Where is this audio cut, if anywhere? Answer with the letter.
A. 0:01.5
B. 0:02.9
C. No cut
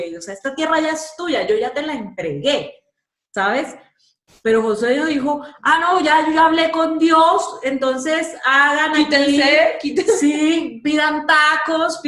C